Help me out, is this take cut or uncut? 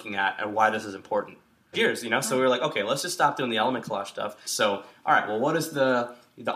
cut